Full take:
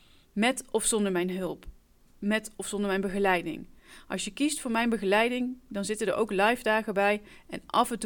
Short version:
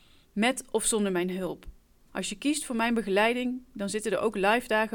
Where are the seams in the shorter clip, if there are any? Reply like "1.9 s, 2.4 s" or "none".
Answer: 2.1 s